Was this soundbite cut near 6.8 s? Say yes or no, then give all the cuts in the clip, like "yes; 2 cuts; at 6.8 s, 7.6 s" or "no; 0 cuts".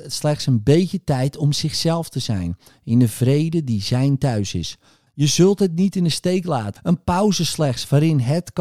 yes; 2 cuts; at 5.1 s, 6.8 s